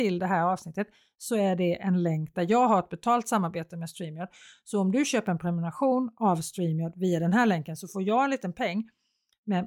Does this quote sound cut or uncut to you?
uncut